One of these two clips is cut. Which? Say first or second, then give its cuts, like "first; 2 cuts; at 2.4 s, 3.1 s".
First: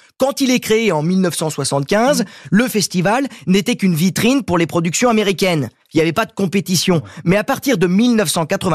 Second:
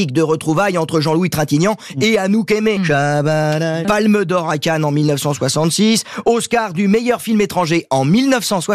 second; 2 cuts; at 2.8 s, 3.8 s